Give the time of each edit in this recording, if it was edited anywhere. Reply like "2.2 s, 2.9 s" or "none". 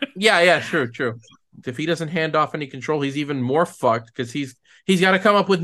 1.6 s